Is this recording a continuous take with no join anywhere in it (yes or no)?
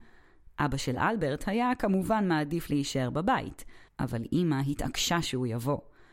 no